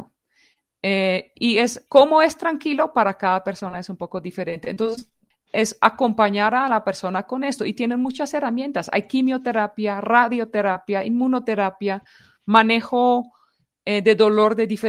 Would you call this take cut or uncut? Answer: cut